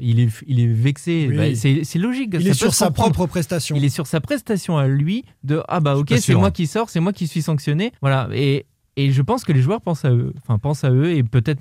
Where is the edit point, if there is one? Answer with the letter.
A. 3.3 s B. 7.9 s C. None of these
B